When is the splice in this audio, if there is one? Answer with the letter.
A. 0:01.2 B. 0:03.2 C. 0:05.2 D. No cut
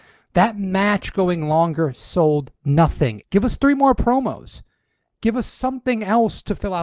B